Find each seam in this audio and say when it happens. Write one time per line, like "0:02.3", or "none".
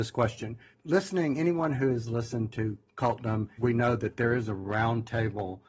0:03.6